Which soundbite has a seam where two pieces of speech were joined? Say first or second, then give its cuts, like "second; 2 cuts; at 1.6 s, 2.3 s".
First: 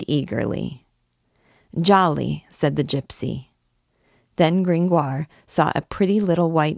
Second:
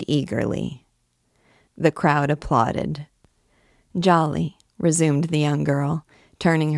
second; 1 cut; at 1.7 s